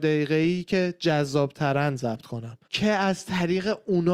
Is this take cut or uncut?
cut